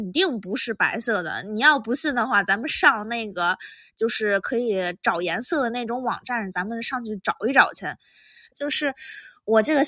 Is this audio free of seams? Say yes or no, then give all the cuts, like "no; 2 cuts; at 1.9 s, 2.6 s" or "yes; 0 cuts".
no; 1 cut; at 8.5 s